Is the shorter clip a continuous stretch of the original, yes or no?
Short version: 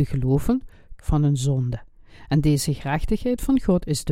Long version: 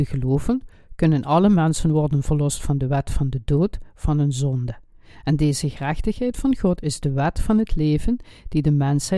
no